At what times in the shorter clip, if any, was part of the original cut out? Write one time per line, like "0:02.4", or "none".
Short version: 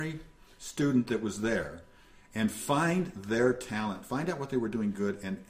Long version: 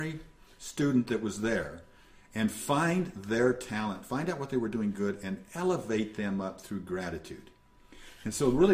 none